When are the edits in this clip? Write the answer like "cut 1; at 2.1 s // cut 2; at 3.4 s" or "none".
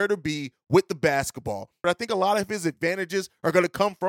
cut 1; at 1.8 s